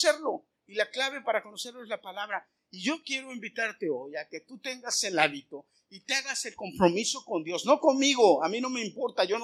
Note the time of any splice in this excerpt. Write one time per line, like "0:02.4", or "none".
none